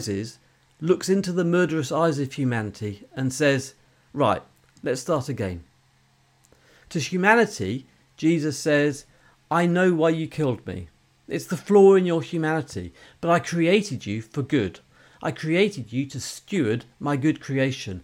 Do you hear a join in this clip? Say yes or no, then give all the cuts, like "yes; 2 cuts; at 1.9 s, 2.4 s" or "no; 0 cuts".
no; 0 cuts